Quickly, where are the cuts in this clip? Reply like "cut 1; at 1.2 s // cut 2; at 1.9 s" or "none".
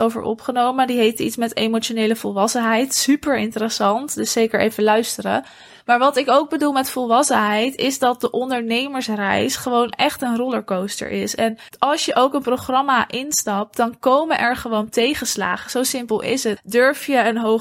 cut 1; at 11.7 s // cut 2; at 16.6 s